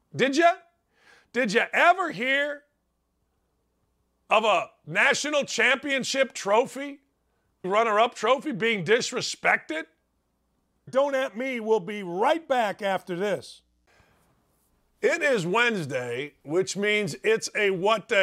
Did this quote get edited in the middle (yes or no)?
yes